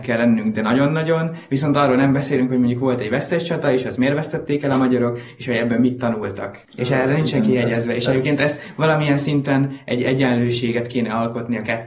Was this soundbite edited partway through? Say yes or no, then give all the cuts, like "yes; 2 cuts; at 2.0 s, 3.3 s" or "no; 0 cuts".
yes; 1 cut; at 6.6 s